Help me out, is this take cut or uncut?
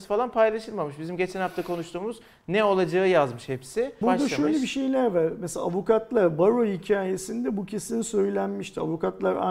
cut